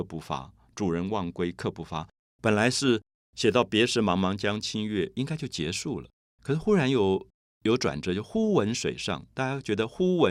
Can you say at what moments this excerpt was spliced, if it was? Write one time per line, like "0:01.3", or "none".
0:02.2